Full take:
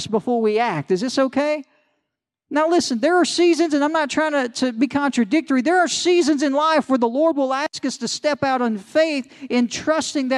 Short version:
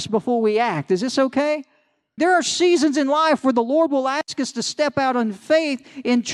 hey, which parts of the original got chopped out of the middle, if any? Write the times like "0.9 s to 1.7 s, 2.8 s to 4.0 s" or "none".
2.2 s to 5.6 s